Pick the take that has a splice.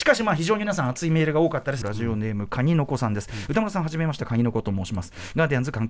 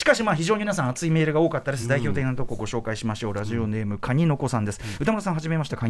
first; 1 cut; at 1.8 s

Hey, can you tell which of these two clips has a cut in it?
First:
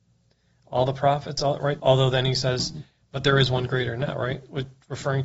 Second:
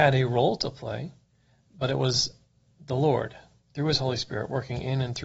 first; 1 cut; at 1.8 s

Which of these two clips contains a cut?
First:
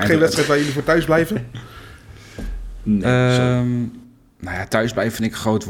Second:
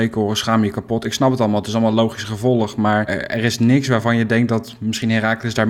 second; 1 cut; at 3.1 s

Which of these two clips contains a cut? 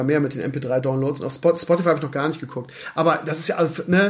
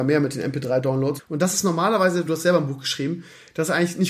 second; 2 cuts; at 1.2 s, 2.3 s

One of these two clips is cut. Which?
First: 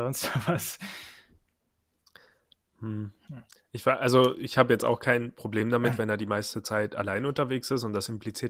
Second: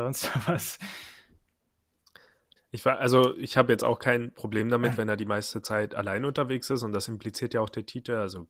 second; 1 cut; at 2.6 s

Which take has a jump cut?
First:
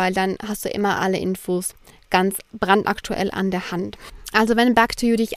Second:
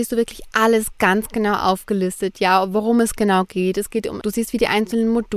second; 1 cut; at 4.2 s

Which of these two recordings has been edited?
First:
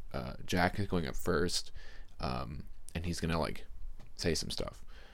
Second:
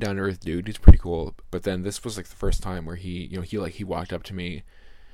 second; 1 cut; at 1.4 s

